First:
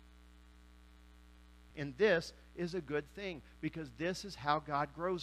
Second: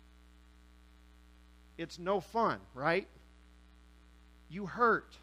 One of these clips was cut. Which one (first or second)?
first